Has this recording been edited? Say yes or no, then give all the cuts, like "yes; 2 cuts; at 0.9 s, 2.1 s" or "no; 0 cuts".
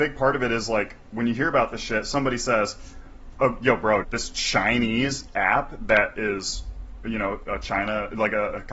yes; 2 cuts; at 4.0 s, 7.4 s